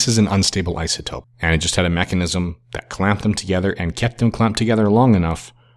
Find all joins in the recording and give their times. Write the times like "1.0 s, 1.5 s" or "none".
1.2 s